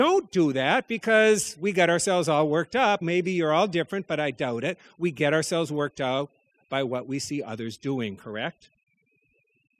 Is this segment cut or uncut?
cut